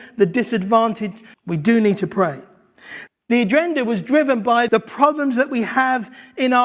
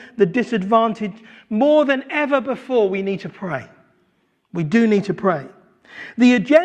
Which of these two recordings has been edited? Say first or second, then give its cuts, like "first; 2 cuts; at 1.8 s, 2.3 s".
first; 3 cuts; at 1.3 s, 3.1 s, 4.7 s